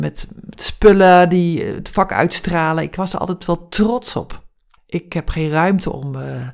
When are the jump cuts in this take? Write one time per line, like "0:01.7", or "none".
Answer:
0:04.8